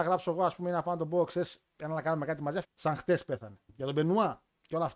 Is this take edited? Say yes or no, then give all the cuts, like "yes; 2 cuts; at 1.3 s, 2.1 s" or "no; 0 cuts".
yes; 1 cut; at 2.6 s